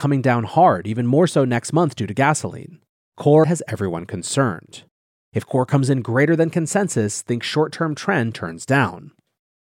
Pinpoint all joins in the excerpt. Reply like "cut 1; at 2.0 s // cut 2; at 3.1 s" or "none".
cut 1; at 3.4 s